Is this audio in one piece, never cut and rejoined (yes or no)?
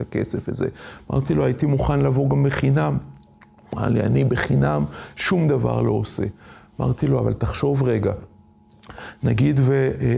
yes